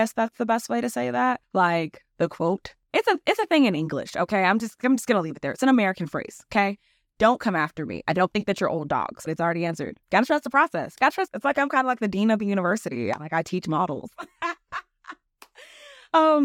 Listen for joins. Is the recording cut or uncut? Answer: cut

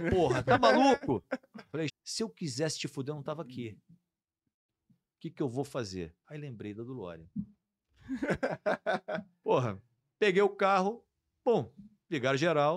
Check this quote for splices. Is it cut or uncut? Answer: cut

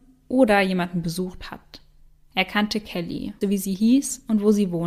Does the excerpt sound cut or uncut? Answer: cut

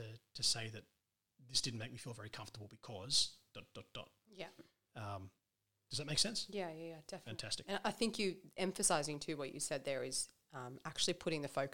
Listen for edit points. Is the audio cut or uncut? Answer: uncut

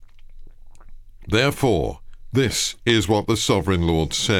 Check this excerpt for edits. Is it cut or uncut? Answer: uncut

